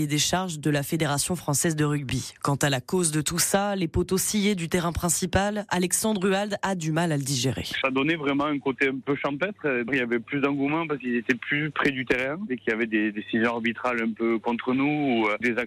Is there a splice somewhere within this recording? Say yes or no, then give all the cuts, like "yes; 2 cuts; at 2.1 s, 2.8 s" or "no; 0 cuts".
yes; 1 cut; at 7.8 s